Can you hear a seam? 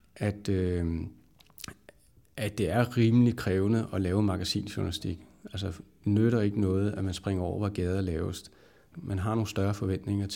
yes; 1 cut; at 8.9 s

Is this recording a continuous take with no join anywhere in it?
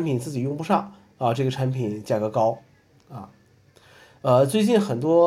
yes; 0 cuts

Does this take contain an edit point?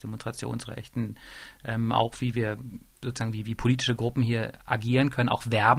no; 0 cuts

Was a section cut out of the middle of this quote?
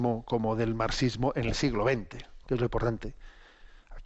yes; 1 cut; at 2.4 s

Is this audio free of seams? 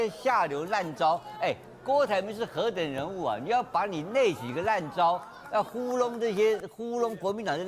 yes; 0 cuts

